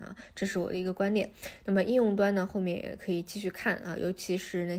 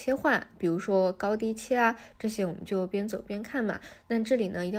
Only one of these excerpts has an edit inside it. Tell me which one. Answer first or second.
second